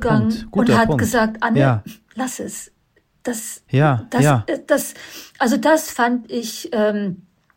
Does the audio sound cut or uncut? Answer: uncut